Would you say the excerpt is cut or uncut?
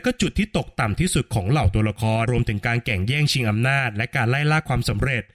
cut